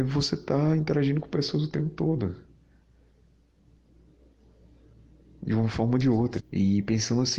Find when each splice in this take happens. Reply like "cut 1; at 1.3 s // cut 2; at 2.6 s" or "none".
cut 1; at 6.4 s